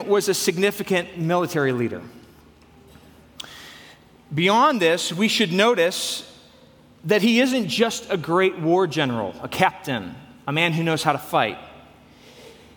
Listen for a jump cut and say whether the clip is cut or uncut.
uncut